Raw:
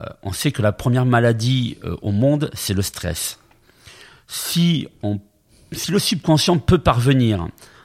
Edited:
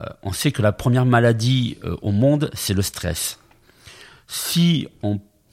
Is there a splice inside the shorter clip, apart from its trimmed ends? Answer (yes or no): no